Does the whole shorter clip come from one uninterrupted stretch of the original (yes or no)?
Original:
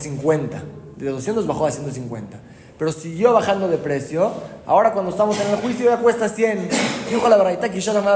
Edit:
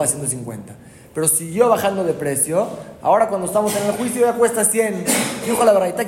yes